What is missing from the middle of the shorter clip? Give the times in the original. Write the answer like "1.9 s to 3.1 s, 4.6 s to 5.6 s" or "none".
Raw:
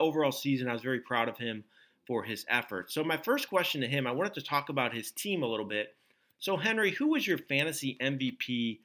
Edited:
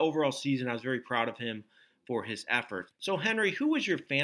2.9 s to 6.3 s